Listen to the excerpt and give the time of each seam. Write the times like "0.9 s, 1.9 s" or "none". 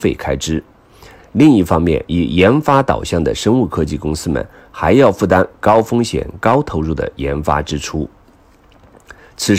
none